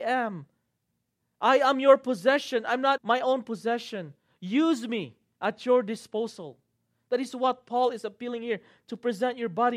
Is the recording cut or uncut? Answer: cut